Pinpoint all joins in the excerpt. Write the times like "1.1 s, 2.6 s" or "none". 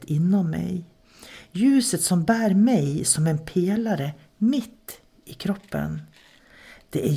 none